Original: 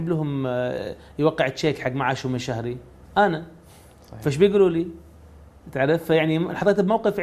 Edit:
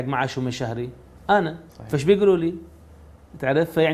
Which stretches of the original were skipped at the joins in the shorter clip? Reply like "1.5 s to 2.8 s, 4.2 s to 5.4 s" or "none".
3.6 s to 4.0 s